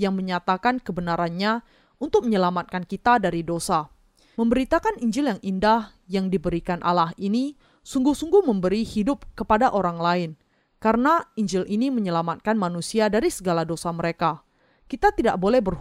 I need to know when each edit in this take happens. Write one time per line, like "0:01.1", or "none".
0:04.3